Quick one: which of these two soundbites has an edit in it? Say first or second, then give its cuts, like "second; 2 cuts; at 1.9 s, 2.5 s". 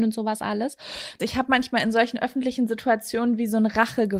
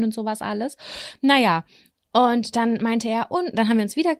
first; 1 cut; at 1.2 s